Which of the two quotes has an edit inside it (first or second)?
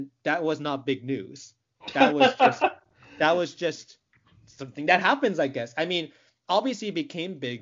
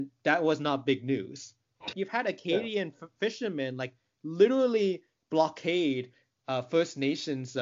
second